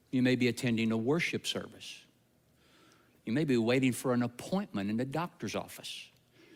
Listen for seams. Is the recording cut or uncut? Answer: cut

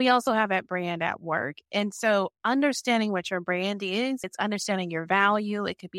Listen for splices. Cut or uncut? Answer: cut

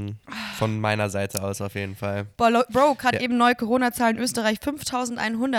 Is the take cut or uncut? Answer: uncut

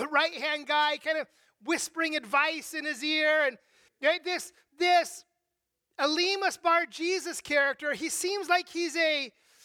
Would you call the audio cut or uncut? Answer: cut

